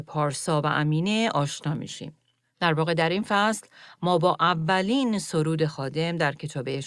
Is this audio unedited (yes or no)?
yes